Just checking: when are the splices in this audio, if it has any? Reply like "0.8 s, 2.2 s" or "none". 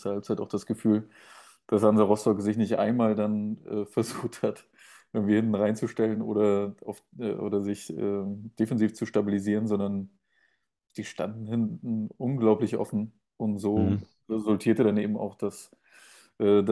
none